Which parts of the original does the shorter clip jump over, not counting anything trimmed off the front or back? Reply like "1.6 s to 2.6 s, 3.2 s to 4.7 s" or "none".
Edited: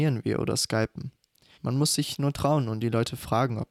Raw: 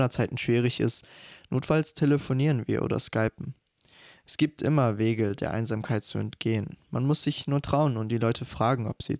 4.0 s to 6.8 s